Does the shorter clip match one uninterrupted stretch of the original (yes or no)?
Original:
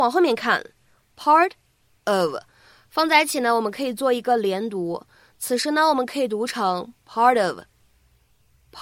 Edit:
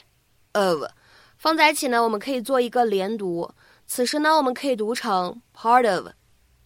yes